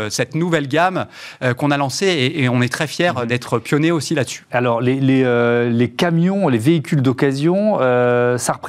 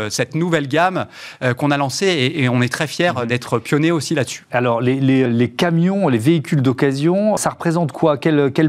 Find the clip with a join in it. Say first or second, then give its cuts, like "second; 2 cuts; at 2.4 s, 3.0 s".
second; 2 cuts; at 5.3 s, 7.4 s